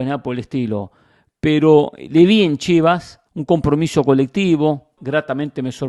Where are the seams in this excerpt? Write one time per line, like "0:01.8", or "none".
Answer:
0:03.3
0:05.0